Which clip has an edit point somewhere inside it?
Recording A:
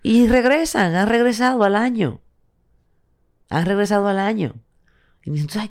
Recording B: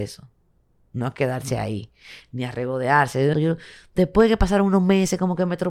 B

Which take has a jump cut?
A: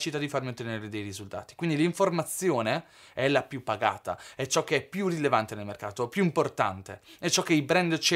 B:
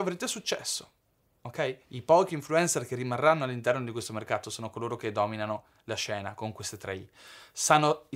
B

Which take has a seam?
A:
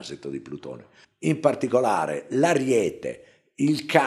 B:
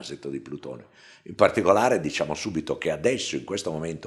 A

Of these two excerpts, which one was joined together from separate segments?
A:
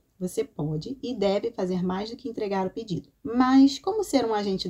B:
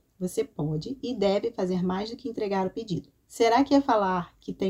B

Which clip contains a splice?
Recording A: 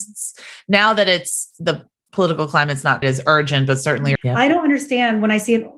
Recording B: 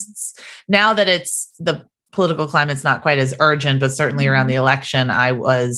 A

